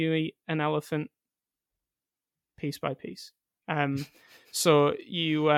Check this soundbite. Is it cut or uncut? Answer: uncut